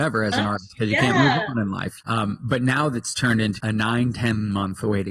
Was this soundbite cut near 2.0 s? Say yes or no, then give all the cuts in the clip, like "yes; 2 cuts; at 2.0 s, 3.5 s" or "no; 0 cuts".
yes; 2 cuts; at 2.0 s, 3.6 s